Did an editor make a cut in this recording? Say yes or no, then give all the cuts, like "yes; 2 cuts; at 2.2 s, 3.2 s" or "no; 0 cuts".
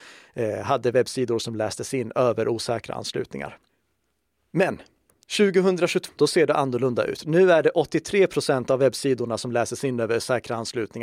yes; 1 cut; at 6.2 s